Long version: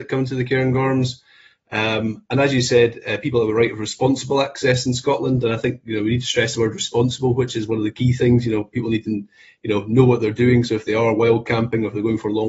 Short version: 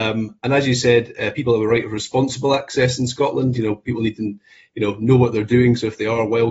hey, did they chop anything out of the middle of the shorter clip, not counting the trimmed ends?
yes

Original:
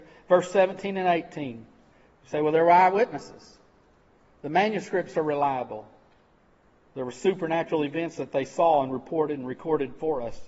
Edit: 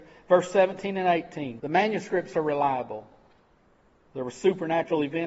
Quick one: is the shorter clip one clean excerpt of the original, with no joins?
no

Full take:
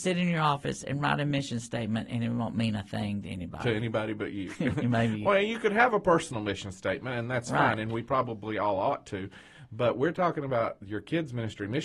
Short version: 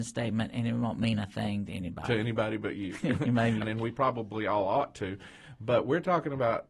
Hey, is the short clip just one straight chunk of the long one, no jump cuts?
no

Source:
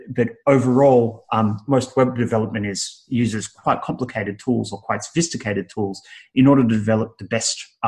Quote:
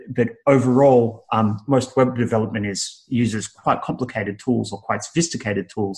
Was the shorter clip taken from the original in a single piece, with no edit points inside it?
yes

